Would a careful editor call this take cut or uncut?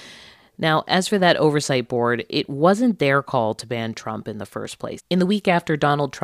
cut